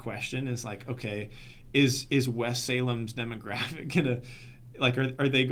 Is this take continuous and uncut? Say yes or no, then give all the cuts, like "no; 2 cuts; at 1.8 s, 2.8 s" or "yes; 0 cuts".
yes; 0 cuts